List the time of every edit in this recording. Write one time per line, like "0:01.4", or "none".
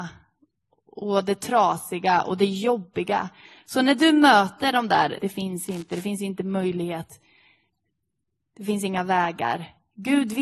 0:05.2